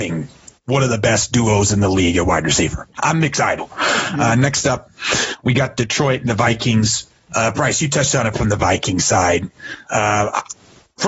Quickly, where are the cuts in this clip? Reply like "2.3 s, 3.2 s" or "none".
3.6 s